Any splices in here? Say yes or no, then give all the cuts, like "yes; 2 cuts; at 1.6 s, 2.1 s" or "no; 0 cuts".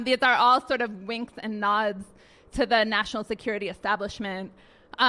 no; 0 cuts